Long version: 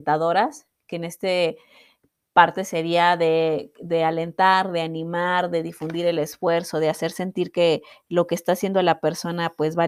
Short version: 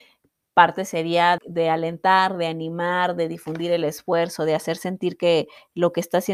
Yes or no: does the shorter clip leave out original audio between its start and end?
yes